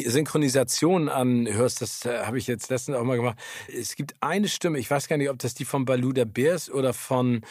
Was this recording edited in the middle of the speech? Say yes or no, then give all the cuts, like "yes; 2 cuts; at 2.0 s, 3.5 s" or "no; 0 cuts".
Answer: yes; 1 cut; at 3.7 s